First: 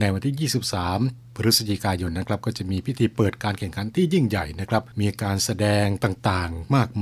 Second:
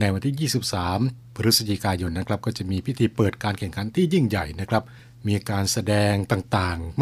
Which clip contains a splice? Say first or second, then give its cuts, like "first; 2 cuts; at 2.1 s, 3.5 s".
first; 1 cut; at 4.9 s